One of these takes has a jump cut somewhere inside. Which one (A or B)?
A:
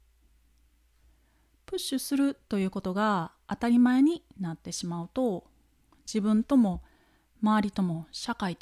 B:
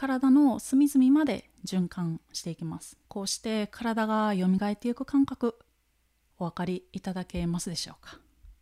B